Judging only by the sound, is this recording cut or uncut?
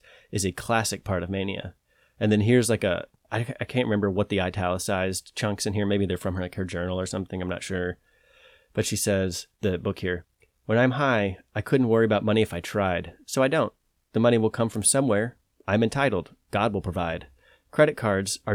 cut